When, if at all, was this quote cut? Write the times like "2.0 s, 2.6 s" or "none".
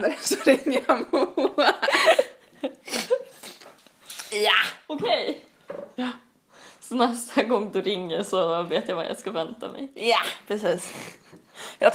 none